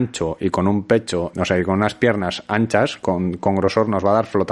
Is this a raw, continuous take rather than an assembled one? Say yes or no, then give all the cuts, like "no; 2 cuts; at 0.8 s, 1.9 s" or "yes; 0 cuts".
no; 1 cut; at 1.3 s